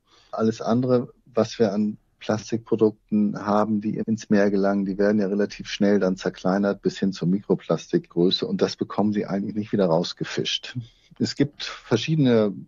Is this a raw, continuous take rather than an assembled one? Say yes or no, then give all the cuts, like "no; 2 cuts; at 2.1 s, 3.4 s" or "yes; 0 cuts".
yes; 0 cuts